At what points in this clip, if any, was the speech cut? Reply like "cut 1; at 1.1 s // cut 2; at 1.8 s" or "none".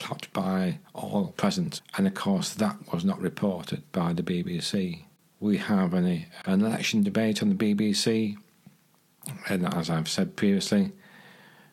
cut 1; at 1.8 s